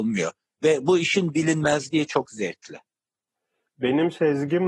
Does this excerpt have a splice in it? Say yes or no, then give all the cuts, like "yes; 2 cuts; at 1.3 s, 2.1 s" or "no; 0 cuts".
no; 0 cuts